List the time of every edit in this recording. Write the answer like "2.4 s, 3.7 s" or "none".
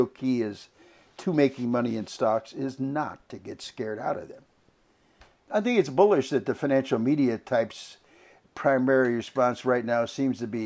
none

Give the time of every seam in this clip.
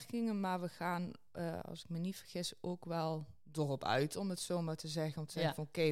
none

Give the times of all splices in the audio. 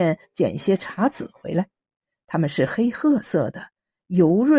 none

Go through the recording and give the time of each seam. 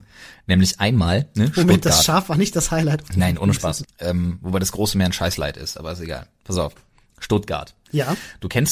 3.8 s

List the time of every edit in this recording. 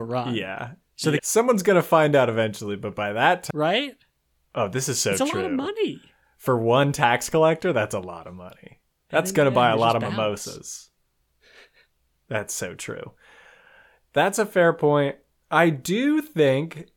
1.2 s, 3.5 s

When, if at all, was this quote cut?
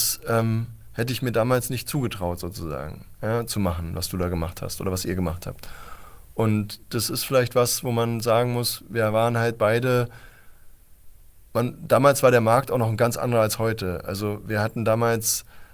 none

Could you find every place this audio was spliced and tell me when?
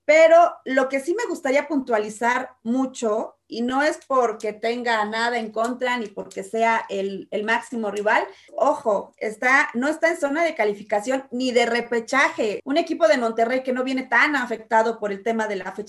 8.5 s, 12.6 s

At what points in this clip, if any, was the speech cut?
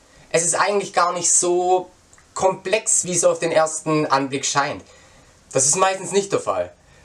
3.0 s, 5.4 s

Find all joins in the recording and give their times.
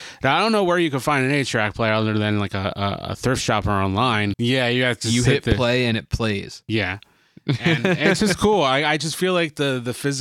4.3 s

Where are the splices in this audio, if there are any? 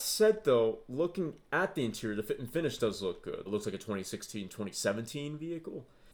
3.5 s

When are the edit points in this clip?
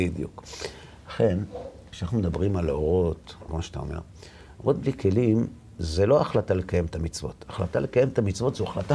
3.5 s

